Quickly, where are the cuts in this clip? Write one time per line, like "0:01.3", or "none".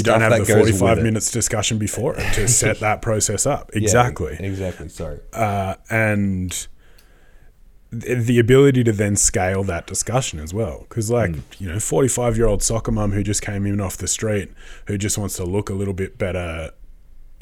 none